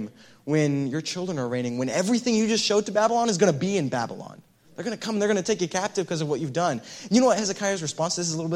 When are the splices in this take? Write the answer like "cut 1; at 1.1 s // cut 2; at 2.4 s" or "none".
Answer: none